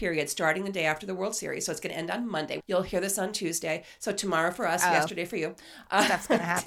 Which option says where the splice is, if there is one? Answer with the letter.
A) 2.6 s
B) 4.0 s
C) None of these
A